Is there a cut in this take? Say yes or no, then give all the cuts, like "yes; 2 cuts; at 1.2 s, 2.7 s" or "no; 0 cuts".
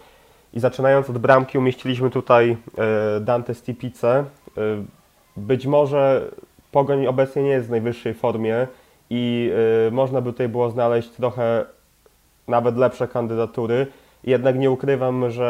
no; 0 cuts